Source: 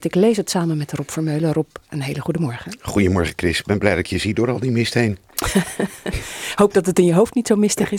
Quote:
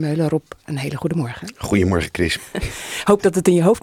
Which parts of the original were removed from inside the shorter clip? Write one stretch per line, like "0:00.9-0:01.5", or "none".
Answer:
0:03.6-0:05.9